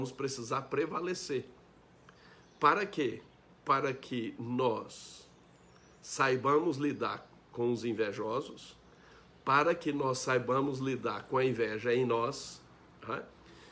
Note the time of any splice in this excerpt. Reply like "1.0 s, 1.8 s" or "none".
none